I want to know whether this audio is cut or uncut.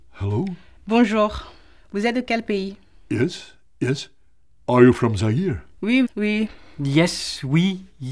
cut